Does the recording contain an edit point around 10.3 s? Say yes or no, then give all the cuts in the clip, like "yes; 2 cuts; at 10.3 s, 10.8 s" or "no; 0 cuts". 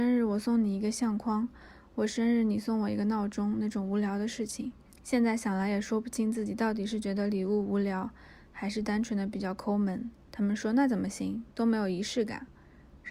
yes; 2 cuts; at 4.9 s, 10.3 s